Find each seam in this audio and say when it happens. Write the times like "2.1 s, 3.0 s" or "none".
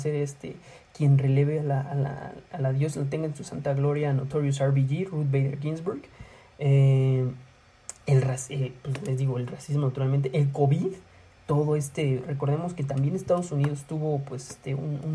none